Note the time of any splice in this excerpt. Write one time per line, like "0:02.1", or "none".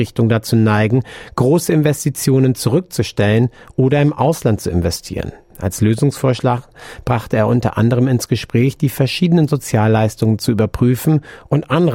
0:05.5